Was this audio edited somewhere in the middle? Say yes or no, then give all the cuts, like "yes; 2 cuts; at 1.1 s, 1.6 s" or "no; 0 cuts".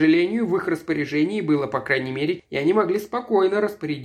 yes; 1 cut; at 2.4 s